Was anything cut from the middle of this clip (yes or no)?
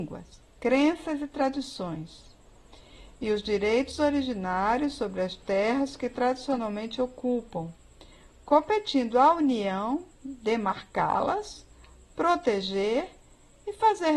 no